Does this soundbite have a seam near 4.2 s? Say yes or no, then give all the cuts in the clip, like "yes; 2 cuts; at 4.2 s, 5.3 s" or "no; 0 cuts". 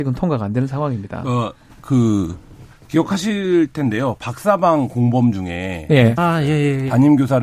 no; 1 cut; at 6.2 s